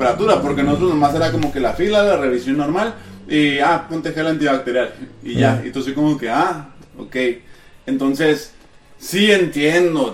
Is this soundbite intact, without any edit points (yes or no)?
yes